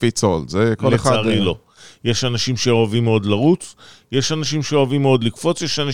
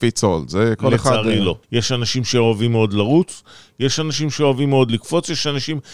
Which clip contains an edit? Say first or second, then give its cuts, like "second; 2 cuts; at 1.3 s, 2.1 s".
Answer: second; 1 cut; at 1.6 s